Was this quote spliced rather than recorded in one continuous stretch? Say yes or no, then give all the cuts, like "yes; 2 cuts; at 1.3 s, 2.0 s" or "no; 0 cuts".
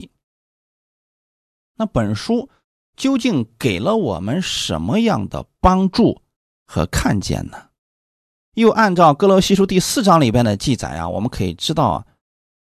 yes; 1 cut; at 8.4 s